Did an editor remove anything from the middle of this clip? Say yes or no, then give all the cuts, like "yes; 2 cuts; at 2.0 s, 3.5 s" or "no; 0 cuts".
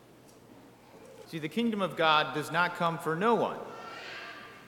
yes; 1 cut; at 1.2 s